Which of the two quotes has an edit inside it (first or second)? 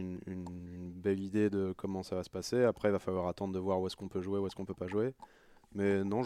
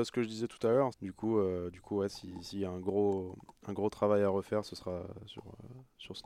second